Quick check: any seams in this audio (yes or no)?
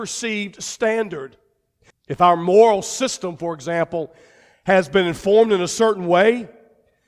yes